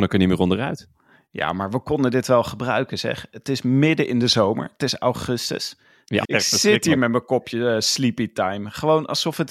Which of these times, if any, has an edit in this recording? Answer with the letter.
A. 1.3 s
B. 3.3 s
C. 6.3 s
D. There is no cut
C